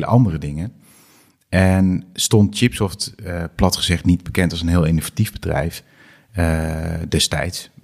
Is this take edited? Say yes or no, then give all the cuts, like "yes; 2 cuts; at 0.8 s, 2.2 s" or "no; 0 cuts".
no; 0 cuts